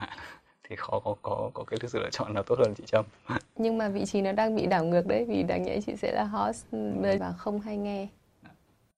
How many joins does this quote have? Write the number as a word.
one